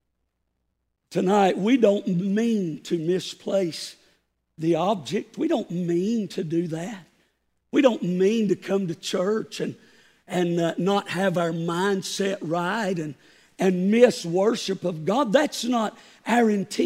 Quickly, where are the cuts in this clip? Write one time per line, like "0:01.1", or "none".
none